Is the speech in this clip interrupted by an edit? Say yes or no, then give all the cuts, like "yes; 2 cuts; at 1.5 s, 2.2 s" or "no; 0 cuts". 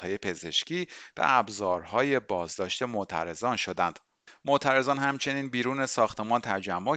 no; 0 cuts